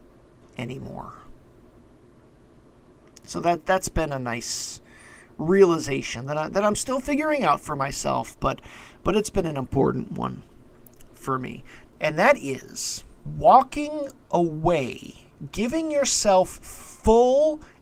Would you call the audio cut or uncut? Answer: cut